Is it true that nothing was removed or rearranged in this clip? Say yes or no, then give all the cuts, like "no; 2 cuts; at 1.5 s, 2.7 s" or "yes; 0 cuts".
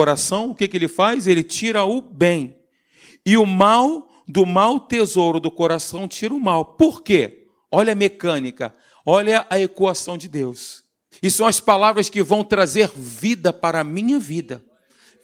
no; 1 cut; at 11.1 s